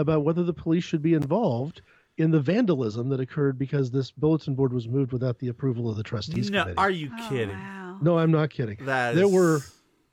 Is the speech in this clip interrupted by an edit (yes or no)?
no